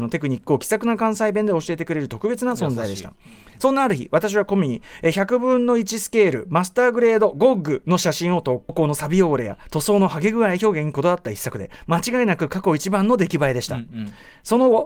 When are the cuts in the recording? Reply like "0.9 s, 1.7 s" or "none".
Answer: 8.7 s